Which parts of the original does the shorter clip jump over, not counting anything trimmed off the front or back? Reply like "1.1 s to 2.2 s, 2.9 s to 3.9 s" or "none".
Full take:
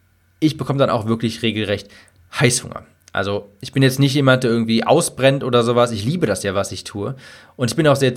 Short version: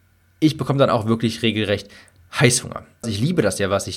3.0 s to 5.9 s